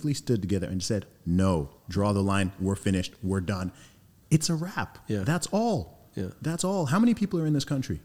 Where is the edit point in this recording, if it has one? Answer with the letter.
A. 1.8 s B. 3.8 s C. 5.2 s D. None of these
A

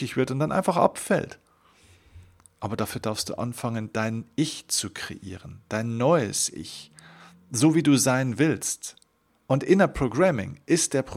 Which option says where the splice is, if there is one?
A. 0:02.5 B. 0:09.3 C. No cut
B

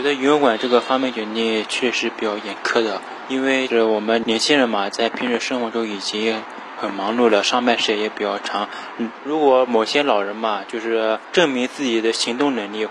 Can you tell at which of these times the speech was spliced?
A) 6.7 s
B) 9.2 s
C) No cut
C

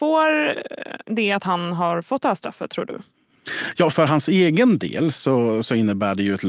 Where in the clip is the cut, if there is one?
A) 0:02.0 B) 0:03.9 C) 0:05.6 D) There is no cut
B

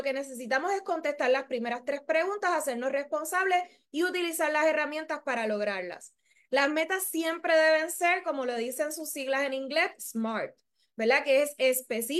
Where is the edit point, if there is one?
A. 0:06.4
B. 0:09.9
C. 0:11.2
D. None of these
D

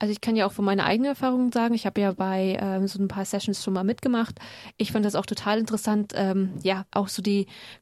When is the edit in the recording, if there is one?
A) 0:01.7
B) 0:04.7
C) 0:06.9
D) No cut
C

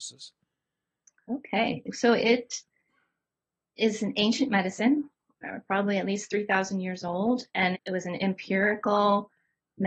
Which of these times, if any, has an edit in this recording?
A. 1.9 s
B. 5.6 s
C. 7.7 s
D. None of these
C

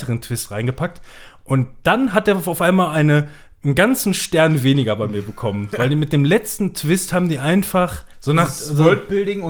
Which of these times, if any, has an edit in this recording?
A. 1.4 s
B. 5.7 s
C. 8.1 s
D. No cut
C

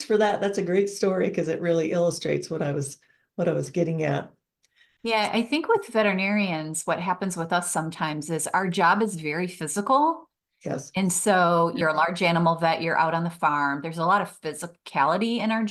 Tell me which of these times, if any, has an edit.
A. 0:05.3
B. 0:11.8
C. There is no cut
B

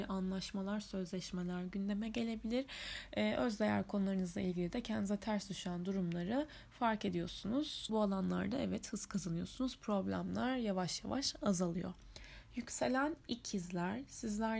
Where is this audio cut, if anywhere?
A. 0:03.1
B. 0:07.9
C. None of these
B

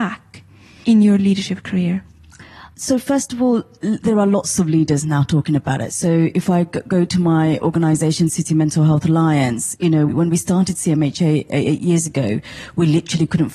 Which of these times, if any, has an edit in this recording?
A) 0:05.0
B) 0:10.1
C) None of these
B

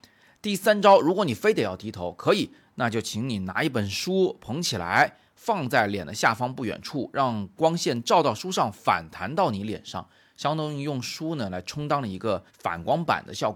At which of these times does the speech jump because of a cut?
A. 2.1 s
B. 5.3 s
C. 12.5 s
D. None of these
C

